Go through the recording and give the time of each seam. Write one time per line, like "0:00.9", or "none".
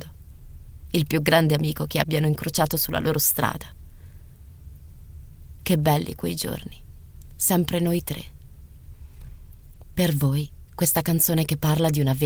0:05.6